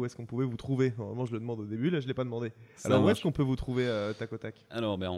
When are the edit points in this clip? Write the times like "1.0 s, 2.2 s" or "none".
none